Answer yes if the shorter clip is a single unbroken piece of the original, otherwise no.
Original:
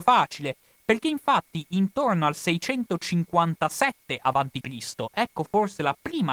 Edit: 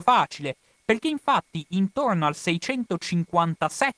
yes